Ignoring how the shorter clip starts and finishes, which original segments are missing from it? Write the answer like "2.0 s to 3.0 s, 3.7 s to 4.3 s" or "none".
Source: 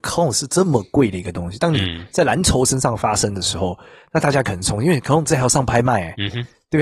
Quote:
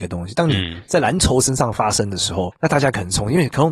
3.8 s to 4.0 s